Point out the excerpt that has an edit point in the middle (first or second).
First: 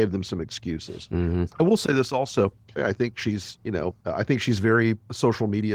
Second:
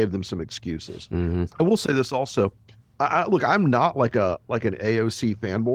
first